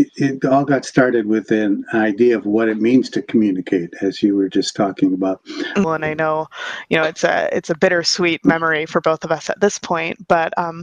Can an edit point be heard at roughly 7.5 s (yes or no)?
no